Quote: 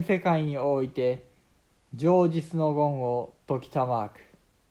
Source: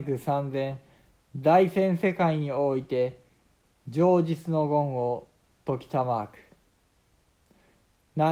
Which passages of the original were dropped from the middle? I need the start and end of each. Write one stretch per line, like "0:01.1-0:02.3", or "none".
0:05.3-0:05.6